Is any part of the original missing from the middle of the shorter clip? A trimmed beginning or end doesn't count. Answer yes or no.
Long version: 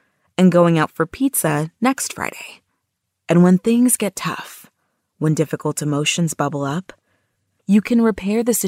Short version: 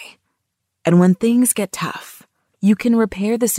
yes